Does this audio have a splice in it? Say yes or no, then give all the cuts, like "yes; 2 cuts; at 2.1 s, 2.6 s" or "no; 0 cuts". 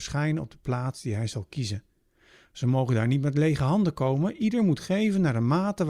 no; 0 cuts